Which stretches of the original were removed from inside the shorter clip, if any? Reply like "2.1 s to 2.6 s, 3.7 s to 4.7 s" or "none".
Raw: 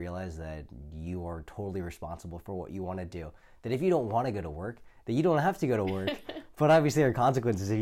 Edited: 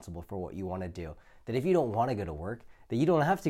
none